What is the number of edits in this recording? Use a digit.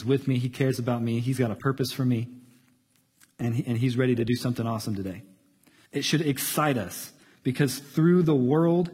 1